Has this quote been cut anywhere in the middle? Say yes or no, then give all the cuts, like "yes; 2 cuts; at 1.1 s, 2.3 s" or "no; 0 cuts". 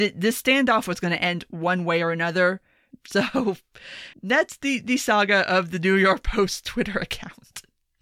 yes; 2 cuts; at 2.9 s, 4.1 s